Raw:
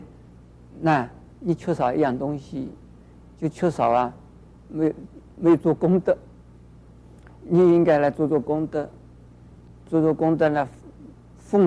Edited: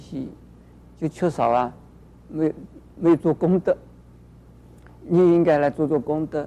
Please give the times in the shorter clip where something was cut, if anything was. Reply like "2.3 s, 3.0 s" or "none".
none